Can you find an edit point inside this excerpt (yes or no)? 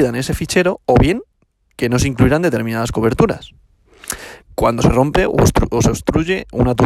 yes